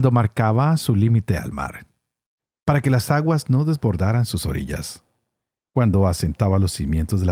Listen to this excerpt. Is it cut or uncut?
uncut